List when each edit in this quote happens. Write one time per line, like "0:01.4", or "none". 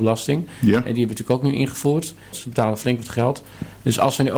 0:02.3